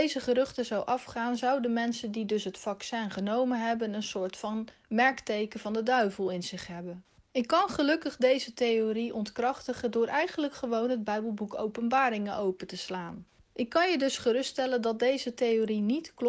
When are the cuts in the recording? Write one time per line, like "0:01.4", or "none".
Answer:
none